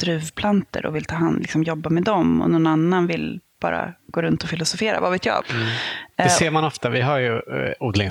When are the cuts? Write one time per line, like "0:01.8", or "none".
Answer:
0:05.4